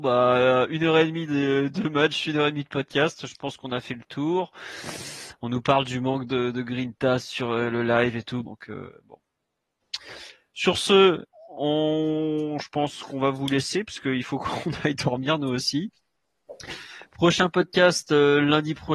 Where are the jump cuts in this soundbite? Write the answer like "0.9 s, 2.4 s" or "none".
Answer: 8.4 s